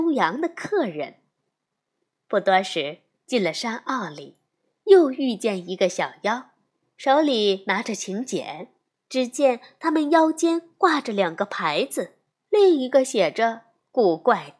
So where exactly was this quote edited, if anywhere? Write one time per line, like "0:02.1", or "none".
0:08.9
0:12.4